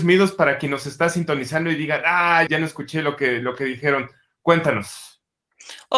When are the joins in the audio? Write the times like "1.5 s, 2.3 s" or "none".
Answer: 2.5 s